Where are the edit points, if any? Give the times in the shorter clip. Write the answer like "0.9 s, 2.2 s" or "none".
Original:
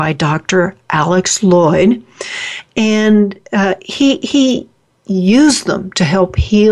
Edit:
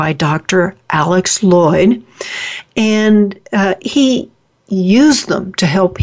3.8 s